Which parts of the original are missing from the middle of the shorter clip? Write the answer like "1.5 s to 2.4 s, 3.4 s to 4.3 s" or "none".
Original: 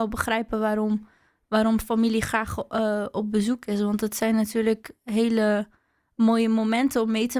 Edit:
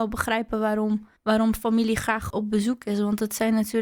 1.2 s to 1.4 s, 2.6 s to 3.1 s

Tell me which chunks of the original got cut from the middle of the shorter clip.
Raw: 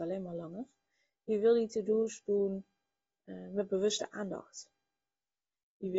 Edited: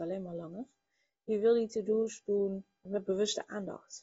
2.9 s to 3.5 s

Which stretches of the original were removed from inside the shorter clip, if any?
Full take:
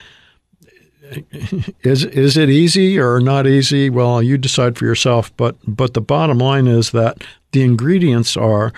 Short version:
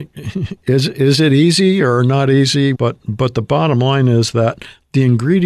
3.9 s to 5.3 s

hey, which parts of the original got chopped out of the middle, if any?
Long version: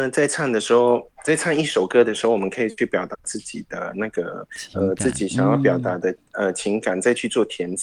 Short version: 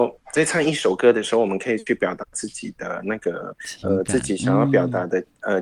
none

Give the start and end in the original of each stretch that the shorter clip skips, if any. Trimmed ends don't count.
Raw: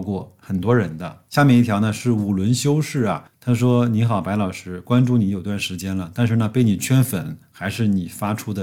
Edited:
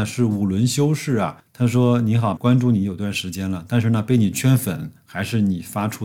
4.2 s to 4.8 s

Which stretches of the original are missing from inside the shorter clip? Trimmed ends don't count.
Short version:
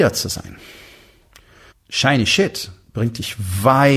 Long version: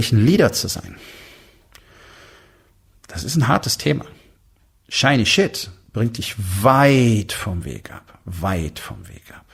2.1 s to 4.7 s

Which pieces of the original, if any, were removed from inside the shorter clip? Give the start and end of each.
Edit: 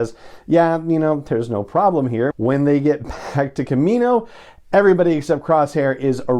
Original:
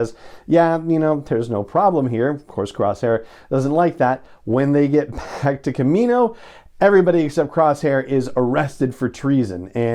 2.3 s to 4.4 s

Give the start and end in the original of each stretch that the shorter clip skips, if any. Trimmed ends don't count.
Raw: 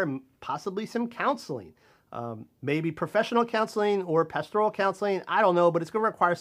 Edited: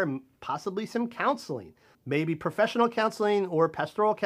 1.9 s to 2.5 s

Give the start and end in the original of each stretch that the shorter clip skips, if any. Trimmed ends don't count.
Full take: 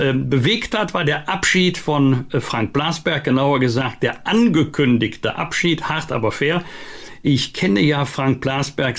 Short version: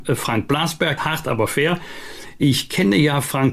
3.2 s to 5.8 s

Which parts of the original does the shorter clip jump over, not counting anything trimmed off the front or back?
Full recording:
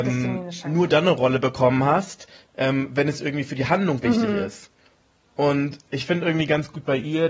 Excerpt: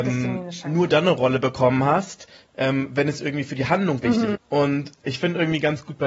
4.3 s to 5.2 s

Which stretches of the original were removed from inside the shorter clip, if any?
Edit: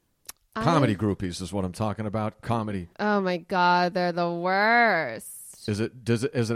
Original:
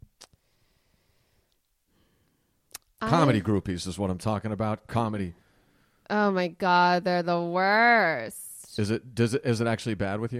5.4 s to 6.0 s

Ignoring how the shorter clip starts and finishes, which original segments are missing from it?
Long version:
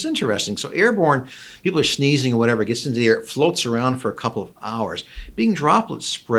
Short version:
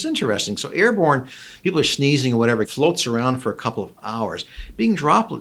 2.6 s to 3.2 s

